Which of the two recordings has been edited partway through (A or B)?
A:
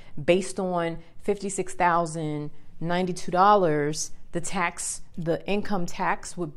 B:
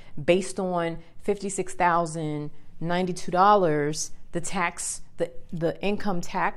A